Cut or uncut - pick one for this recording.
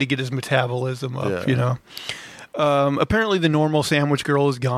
uncut